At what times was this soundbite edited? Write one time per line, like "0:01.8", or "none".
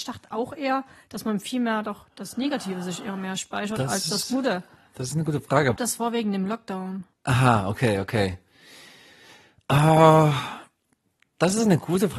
0:05.8
0:07.1